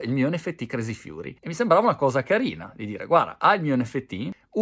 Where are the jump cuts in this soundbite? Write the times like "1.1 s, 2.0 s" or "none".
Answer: none